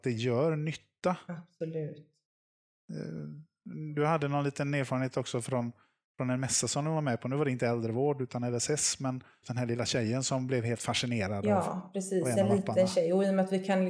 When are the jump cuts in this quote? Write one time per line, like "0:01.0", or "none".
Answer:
0:09.4